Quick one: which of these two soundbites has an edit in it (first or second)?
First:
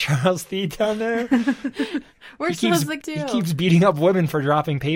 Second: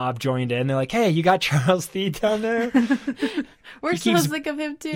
first